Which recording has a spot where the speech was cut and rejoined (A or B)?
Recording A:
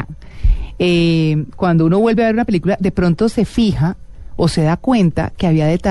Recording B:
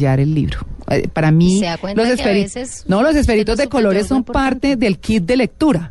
B